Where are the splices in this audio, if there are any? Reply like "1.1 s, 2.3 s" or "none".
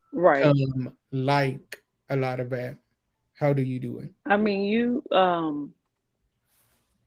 4.2 s